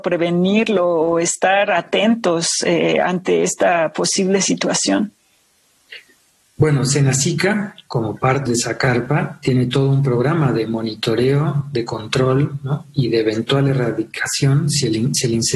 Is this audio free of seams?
no; 1 cut; at 8.5 s

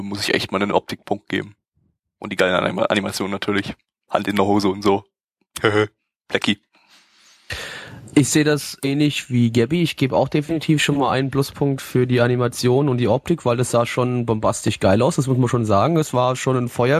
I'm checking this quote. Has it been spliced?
no; 0 cuts

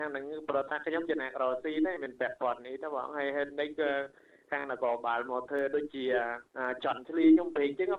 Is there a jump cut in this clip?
yes; 1 cut; at 6.5 s

